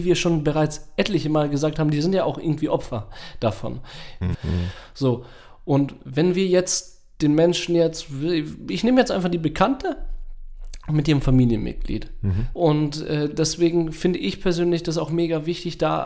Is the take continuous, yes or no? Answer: no